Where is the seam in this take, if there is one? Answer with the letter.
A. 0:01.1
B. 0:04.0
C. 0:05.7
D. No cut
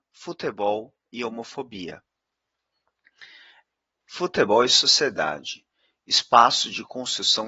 B